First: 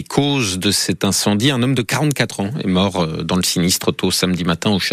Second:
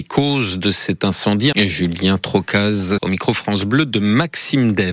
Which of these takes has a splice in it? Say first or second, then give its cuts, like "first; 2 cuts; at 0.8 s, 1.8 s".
second; 2 cuts; at 1.5 s, 3.0 s